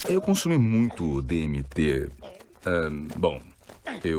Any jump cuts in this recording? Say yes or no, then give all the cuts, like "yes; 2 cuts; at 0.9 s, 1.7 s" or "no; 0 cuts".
no; 0 cuts